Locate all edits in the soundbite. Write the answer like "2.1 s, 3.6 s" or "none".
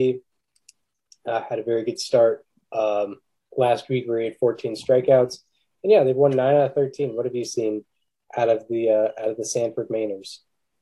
none